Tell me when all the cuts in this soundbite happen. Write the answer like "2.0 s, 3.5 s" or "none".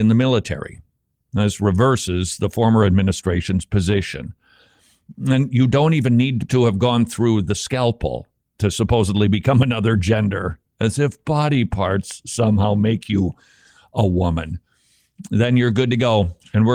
6.5 s